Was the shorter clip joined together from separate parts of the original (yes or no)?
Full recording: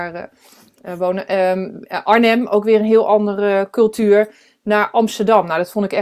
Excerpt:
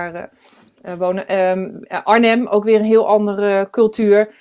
no